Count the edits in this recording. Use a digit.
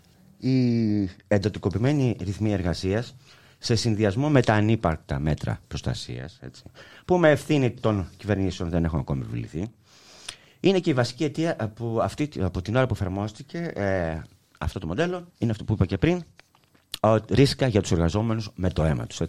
2